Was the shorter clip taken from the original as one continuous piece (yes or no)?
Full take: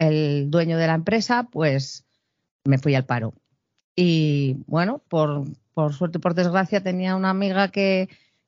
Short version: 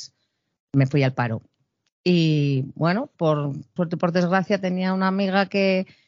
no